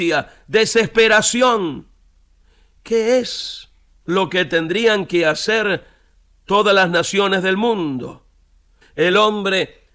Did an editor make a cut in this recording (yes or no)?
yes